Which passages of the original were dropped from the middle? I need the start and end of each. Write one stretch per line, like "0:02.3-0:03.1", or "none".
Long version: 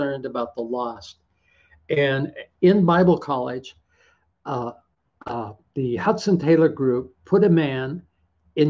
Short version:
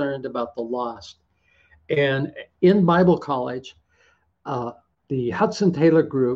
0:05.0-0:05.7